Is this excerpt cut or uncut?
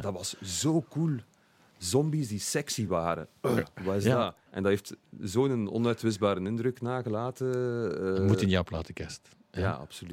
cut